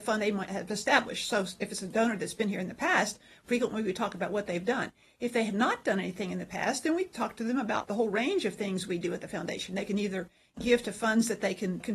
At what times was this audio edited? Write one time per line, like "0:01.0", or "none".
none

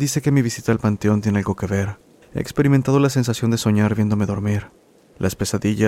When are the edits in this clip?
0:02.2

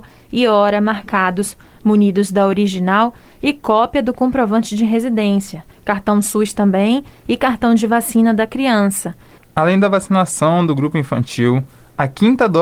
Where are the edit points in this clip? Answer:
0:09.4

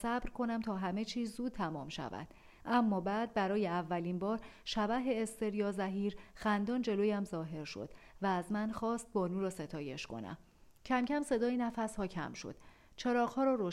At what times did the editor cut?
0:02.6
0:10.8

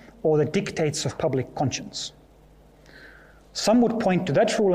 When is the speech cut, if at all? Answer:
none

